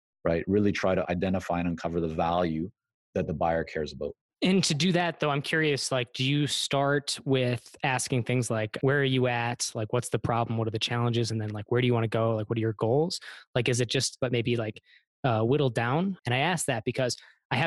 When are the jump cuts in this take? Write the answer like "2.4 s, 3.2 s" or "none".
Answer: 14.2 s, 16.2 s